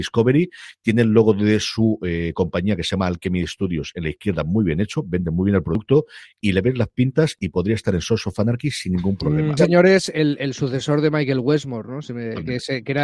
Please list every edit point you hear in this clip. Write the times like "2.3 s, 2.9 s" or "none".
9.6 s